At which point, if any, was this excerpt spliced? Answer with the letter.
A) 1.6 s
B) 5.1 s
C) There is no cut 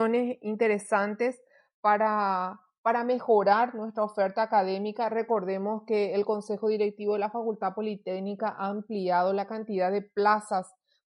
C